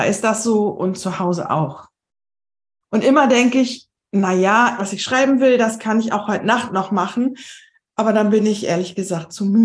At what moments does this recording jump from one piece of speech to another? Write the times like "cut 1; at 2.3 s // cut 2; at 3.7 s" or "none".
cut 1; at 4.8 s